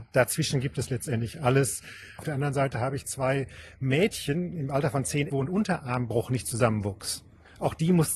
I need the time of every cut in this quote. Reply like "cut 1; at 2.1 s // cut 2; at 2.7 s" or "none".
cut 1; at 2.2 s // cut 2; at 5.3 s